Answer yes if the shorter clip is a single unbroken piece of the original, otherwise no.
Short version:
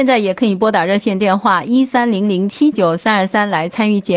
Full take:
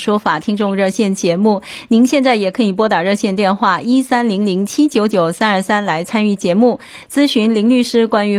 no